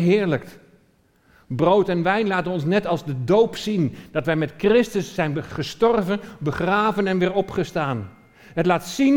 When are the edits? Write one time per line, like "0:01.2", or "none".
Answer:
none